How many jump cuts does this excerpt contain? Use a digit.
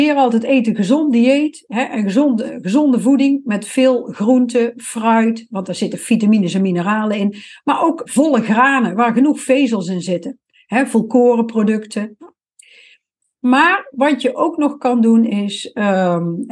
1